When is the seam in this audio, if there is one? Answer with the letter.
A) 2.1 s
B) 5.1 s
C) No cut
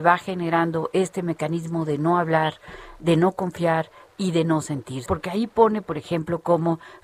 B